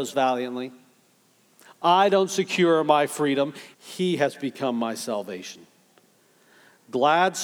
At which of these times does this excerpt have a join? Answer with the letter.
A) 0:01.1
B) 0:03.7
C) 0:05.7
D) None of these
B